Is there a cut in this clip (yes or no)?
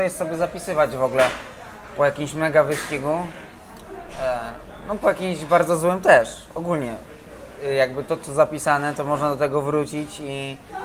no